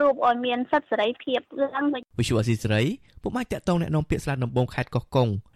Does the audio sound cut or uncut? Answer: cut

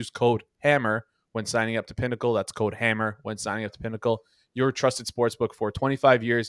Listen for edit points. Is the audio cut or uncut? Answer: uncut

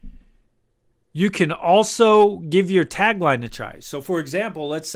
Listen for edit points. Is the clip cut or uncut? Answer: uncut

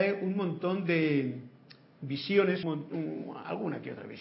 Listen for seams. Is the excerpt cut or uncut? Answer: cut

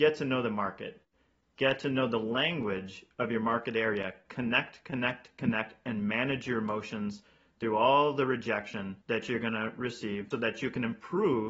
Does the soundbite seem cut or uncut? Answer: cut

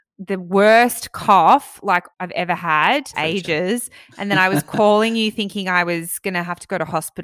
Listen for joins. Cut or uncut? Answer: cut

